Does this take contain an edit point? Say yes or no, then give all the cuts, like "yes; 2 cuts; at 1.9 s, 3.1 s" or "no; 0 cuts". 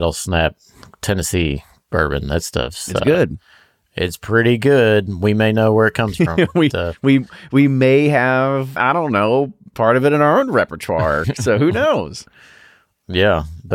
yes; 1 cut; at 8.8 s